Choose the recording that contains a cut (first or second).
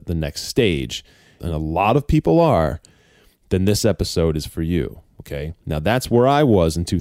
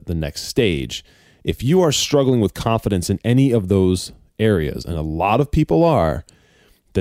first